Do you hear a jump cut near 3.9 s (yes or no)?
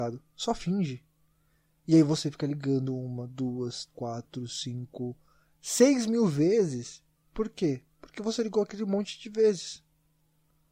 yes